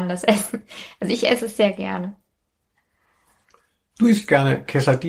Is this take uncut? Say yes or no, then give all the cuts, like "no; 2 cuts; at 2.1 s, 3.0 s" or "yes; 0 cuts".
yes; 0 cuts